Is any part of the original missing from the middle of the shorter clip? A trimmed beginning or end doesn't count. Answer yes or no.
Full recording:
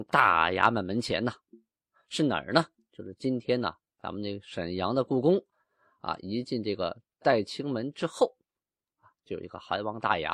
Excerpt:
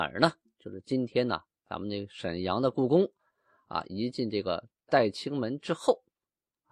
no